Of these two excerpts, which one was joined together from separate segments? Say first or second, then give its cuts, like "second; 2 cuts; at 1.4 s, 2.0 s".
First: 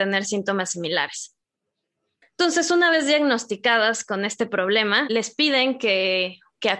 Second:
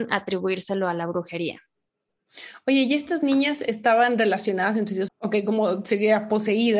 second; 1 cut; at 5.1 s